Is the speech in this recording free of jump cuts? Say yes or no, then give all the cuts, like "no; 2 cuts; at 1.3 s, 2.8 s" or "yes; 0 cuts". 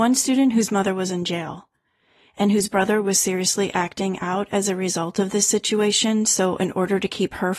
yes; 0 cuts